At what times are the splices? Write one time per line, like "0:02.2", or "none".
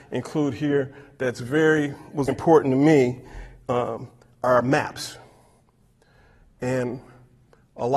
0:02.3